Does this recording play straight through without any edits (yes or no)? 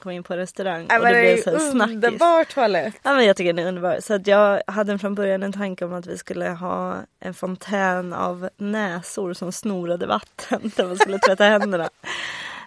yes